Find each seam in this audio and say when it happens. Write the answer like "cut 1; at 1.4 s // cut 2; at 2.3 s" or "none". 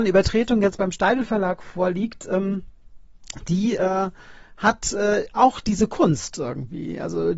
none